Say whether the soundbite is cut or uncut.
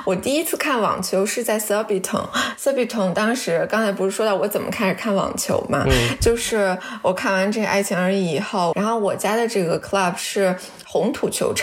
cut